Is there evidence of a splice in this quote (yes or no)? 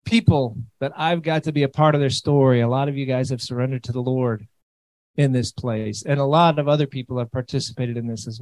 no